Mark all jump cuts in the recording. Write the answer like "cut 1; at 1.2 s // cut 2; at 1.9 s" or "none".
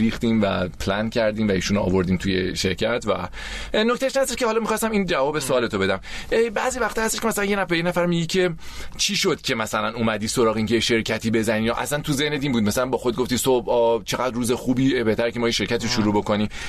cut 1; at 2.6 s